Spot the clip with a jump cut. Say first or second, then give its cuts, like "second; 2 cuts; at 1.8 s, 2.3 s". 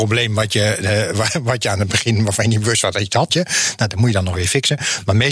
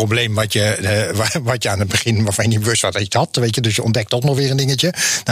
first; 1 cut; at 3.3 s